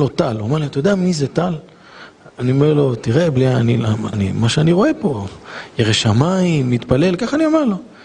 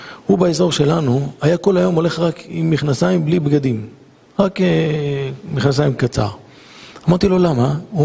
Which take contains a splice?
first; 1 cut; at 4.1 s

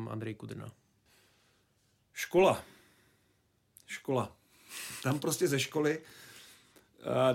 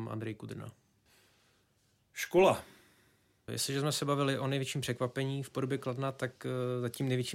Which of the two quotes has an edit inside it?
second; 1 cut; at 3.5 s

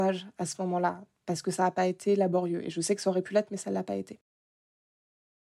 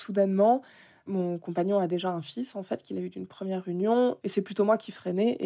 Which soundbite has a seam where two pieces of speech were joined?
second; 1 cut; at 4.2 s

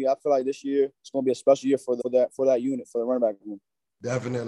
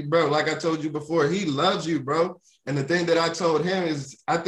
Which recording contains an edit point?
first; 2 cuts; at 1.0 s, 2.0 s

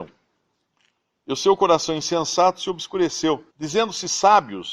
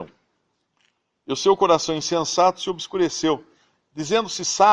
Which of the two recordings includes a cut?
first; 1 cut; at 3.5 s

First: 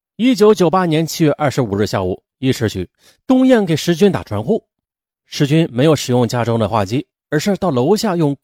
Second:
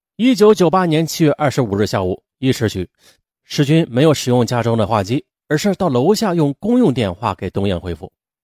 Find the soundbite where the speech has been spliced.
second; 1 cut; at 3.2 s

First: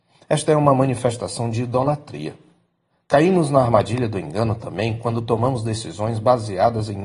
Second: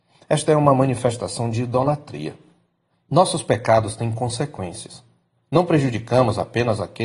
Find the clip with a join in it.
second; 1 cut; at 2.9 s

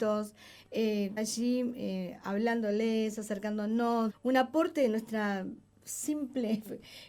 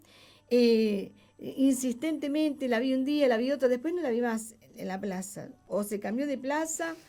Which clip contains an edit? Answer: first; 2 cuts; at 1.2 s, 4.1 s

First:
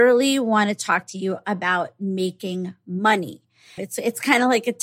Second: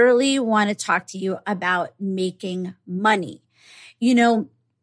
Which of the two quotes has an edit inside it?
first; 1 cut; at 3.8 s

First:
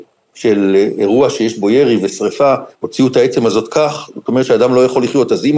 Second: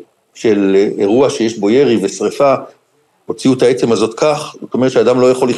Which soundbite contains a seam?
first; 1 cut; at 2.7 s

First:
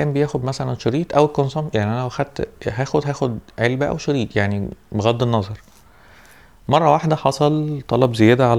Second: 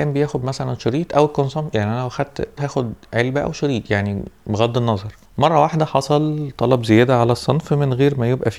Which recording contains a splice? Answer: second; 2 cuts; at 2.6 s, 5.3 s

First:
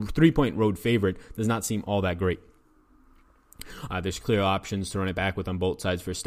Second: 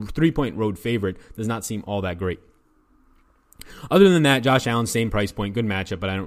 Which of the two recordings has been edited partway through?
first; 1 cut; at 3.9 s

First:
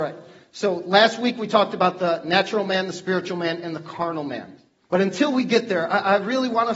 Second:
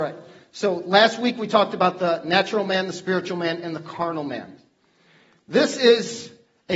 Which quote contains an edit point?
first; 1 cut; at 4.8 s

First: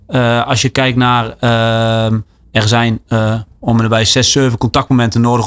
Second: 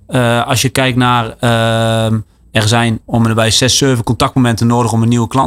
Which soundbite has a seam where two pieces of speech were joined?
second; 1 cut; at 3.0 s

